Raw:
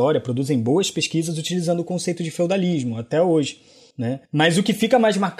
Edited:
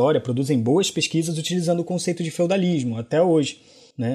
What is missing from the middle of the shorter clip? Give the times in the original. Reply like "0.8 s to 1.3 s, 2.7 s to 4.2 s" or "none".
none